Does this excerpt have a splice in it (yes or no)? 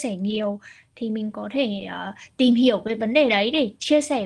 no